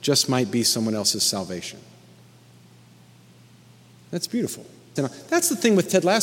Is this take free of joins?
no; 1 cut; at 5.0 s

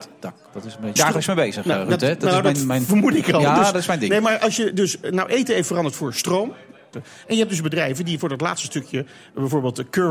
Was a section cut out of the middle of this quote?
yes; 2 cuts; at 1.0 s, 6.9 s

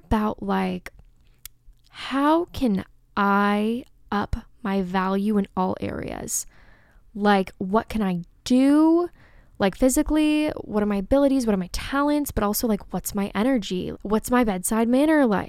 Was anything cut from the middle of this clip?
yes; 1 cut; at 13.9 s

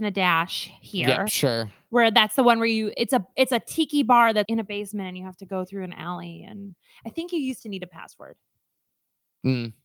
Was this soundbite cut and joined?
yes; 1 cut; at 4.5 s

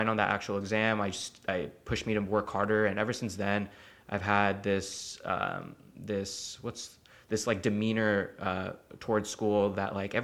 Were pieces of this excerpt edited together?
no; 0 cuts

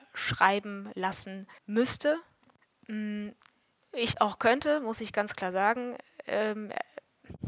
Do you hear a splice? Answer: yes; 1 cut; at 1.6 s

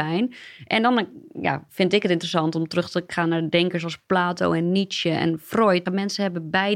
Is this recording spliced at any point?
yes; 1 cut; at 5.9 s

